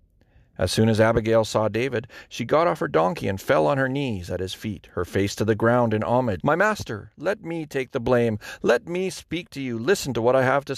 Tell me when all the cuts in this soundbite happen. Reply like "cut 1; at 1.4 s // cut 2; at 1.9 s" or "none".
cut 1; at 6.4 s

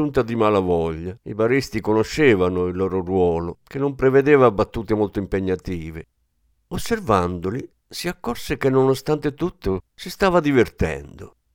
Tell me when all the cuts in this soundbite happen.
cut 1; at 1.2 s

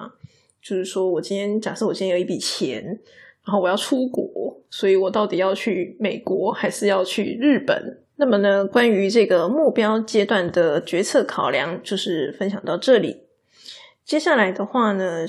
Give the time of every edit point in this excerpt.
cut 1; at 8.1 s

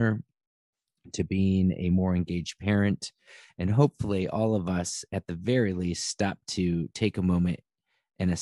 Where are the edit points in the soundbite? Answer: none

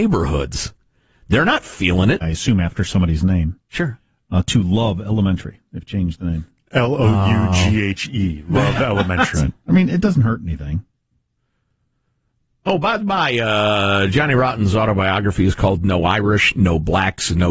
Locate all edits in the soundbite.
cut 1; at 2.2 s // cut 2; at 9.3 s

